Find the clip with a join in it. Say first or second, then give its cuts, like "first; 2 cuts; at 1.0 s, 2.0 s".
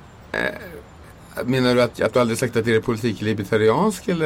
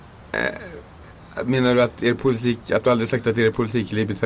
first; 1 cut; at 1.9 s